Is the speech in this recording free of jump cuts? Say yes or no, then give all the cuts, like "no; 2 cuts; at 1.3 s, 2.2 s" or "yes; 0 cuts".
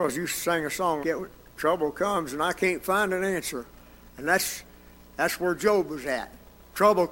no; 1 cut; at 1.0 s